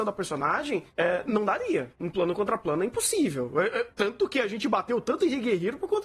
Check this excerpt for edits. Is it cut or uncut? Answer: uncut